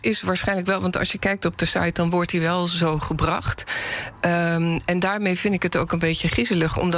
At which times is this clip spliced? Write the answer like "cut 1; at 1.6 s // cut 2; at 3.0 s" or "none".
none